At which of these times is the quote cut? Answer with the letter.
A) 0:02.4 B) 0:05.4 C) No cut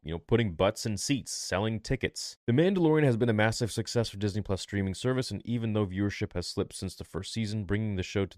A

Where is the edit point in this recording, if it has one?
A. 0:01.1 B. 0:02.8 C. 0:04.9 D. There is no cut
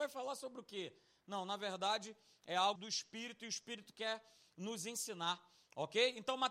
B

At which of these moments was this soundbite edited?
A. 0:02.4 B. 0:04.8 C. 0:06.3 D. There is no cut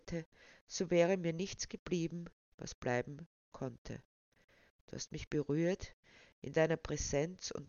A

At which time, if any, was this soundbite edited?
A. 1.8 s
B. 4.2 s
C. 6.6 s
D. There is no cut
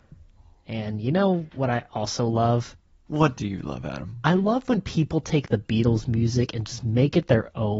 D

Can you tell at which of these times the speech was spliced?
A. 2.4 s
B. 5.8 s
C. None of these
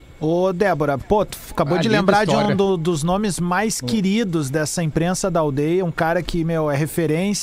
C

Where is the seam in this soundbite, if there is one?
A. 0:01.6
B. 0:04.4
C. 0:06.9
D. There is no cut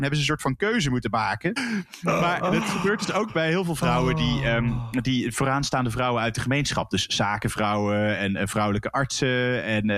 A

